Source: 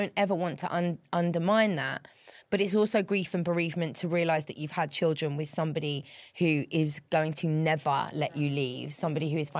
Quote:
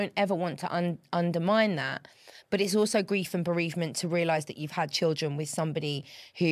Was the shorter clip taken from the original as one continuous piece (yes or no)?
yes